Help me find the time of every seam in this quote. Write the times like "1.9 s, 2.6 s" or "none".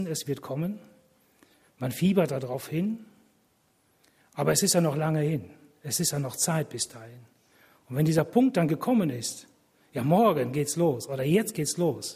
none